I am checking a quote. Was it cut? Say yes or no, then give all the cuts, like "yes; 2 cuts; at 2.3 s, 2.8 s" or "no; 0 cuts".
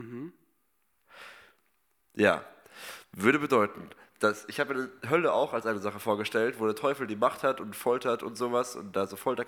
no; 0 cuts